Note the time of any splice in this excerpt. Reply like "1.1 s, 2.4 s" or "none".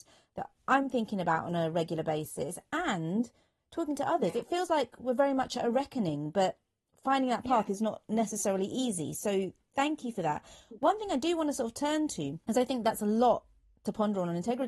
none